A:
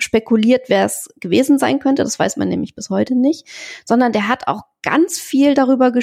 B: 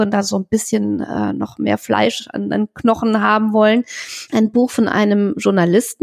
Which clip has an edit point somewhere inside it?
B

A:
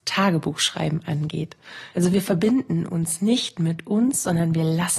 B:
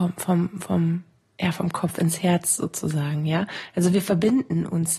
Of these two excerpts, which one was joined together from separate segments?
A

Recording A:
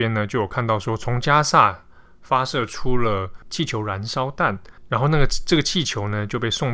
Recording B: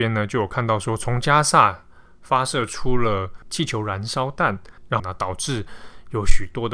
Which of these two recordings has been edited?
B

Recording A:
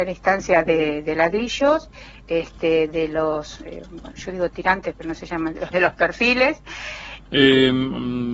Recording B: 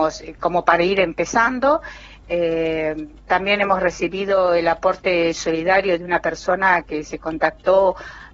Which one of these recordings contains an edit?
A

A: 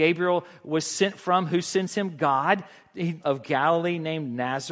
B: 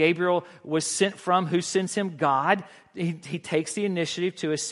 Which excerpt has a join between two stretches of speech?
A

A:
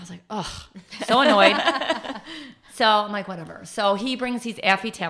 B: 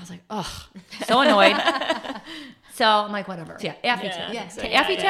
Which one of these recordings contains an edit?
B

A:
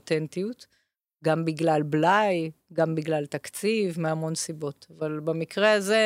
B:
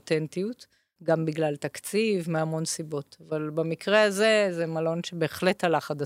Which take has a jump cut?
B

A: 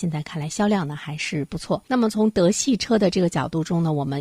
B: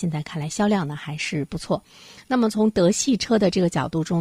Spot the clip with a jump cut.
A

